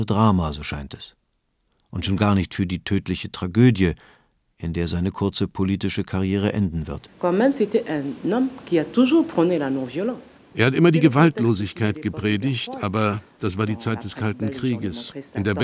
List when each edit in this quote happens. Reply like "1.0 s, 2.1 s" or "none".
none